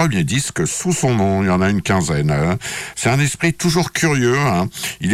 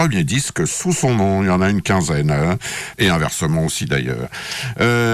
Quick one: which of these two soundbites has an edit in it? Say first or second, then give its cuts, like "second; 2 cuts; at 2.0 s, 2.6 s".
second; 1 cut; at 2.9 s